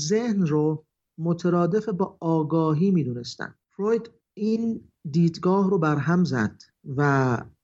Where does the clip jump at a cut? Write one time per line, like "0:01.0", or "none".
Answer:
none